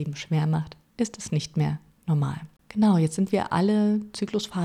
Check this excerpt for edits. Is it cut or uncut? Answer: cut